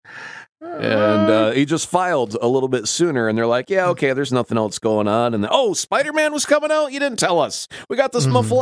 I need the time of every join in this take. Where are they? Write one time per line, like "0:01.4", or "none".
none

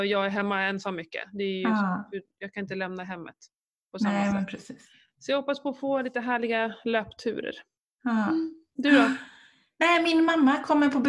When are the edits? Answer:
none

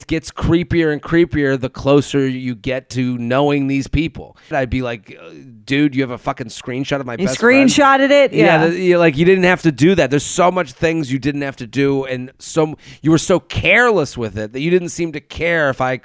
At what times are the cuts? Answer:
0:04.5

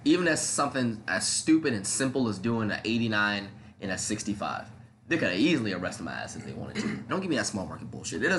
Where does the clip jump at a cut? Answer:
0:07.1

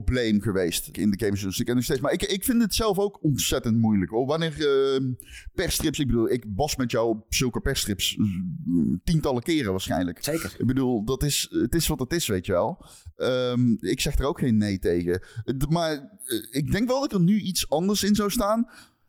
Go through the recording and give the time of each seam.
0:00.9

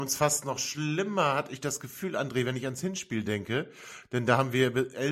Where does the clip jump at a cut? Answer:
none

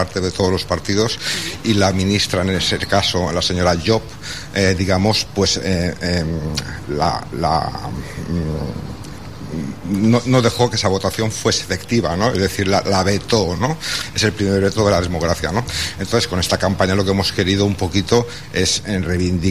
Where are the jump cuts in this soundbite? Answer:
none

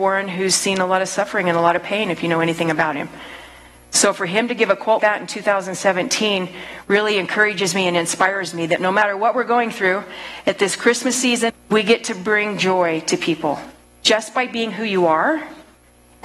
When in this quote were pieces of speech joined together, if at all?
0:05.0
0:11.5

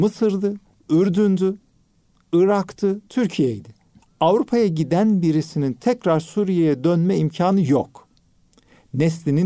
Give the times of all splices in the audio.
0:04.0

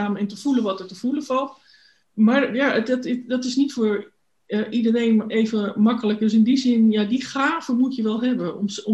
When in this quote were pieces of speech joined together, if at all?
none

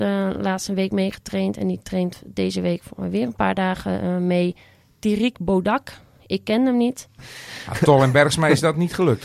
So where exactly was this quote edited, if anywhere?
0:07.2

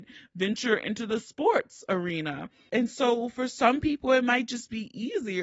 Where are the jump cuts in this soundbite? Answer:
0:02.7

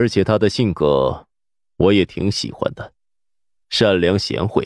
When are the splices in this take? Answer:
0:03.6

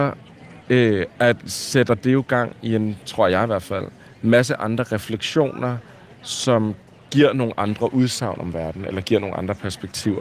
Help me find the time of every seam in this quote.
none

